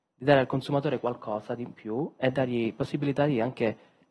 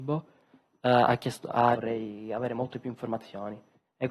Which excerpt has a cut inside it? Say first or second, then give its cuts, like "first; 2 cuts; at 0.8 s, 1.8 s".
second; 1 cut; at 1.7 s